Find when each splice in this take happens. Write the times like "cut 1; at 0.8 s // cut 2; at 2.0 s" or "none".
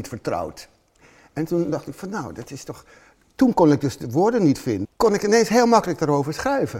cut 1; at 4.8 s